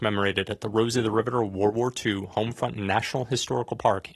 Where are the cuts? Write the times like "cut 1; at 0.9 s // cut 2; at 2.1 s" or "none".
none